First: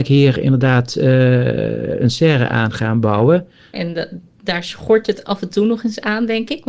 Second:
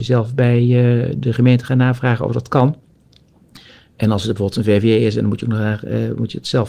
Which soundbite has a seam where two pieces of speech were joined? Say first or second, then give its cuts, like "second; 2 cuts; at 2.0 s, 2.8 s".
first; 1 cut; at 3.7 s